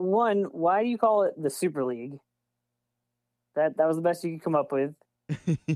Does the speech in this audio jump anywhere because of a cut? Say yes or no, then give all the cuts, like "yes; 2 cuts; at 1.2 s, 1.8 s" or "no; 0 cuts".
no; 0 cuts